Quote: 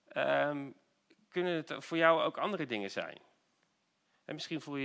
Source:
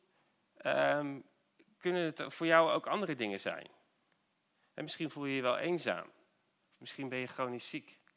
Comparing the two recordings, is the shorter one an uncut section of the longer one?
yes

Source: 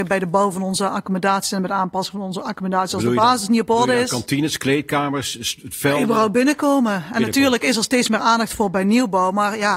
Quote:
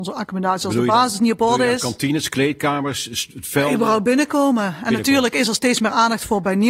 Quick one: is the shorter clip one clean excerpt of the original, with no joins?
yes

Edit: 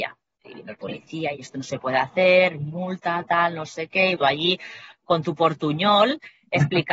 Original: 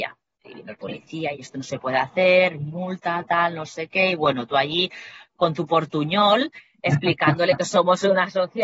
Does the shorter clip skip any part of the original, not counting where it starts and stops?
yes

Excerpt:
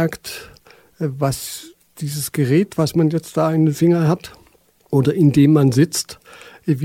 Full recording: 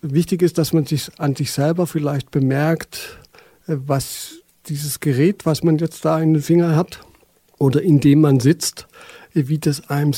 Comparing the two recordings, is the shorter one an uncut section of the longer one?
yes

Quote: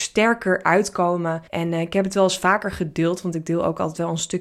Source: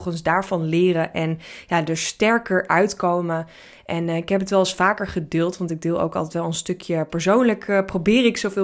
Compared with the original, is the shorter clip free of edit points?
no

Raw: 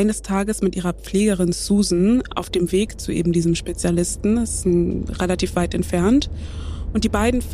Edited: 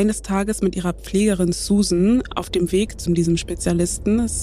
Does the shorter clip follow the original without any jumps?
no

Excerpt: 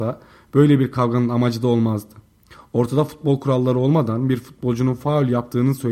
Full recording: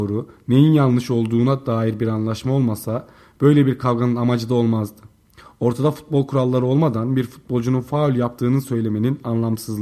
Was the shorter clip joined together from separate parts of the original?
no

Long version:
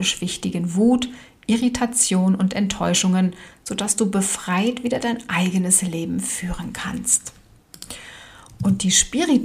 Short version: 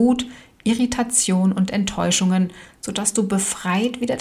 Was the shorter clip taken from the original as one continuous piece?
yes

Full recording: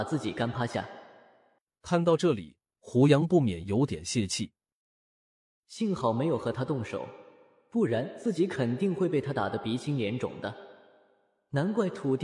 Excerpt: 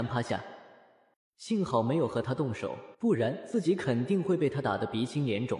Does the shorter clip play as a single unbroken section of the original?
no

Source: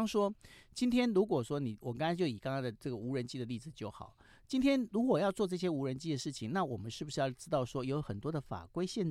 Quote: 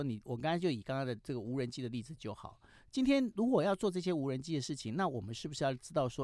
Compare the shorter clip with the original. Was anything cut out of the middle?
no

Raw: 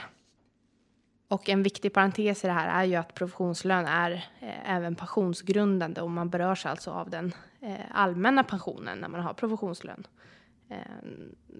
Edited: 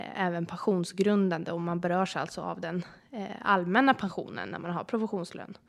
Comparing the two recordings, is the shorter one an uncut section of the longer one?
yes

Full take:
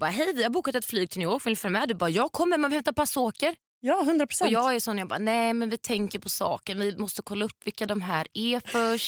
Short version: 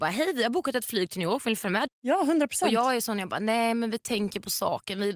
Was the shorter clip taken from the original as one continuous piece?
no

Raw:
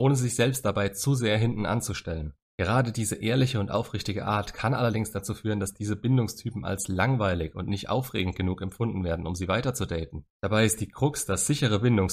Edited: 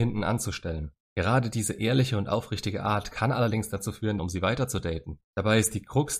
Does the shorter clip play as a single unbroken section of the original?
no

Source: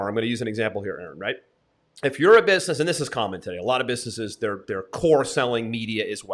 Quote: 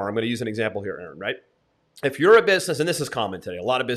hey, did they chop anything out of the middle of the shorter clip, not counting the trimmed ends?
no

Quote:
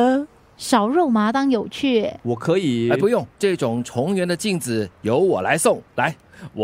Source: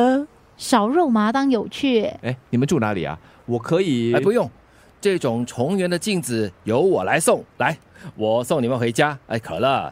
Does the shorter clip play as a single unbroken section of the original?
no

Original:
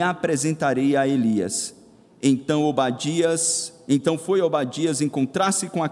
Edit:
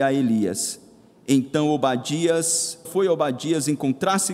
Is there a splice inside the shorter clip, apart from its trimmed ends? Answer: yes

